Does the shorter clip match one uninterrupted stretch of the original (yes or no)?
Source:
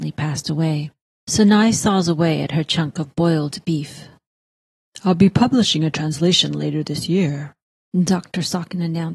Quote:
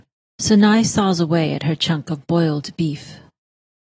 yes